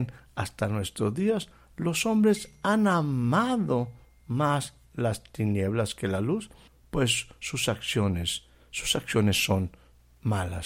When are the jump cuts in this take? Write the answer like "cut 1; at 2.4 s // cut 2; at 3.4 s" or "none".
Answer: none